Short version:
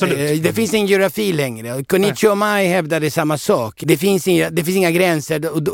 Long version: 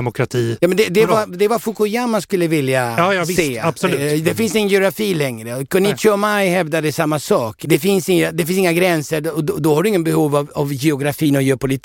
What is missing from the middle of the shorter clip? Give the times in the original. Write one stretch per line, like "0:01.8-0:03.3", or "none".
none